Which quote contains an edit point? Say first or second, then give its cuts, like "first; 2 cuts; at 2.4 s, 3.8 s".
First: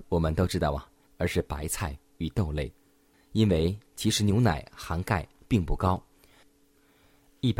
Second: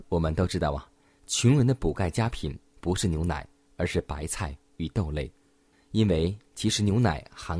first; 1 cut; at 1.1 s